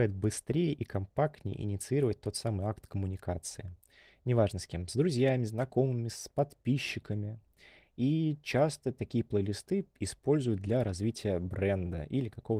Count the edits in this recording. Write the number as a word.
zero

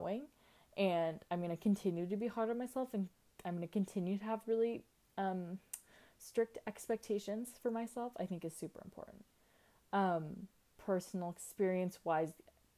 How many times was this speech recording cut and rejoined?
one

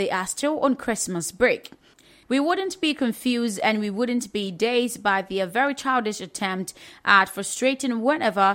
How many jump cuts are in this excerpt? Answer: one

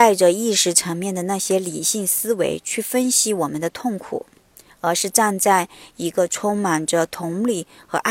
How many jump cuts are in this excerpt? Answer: zero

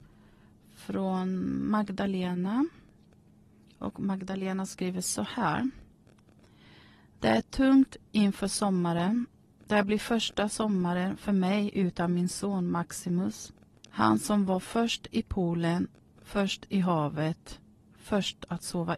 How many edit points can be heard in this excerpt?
zero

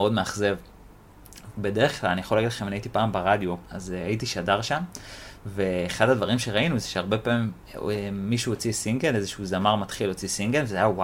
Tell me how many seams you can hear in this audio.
two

